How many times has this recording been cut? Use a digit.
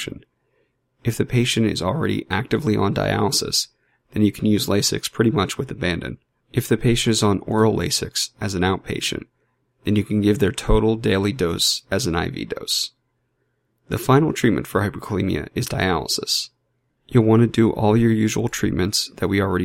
2